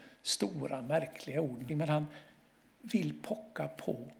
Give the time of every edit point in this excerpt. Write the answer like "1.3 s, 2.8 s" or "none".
1.7 s